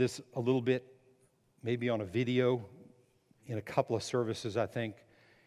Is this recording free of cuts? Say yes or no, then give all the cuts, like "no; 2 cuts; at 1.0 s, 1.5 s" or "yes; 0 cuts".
no; 1 cut; at 3.4 s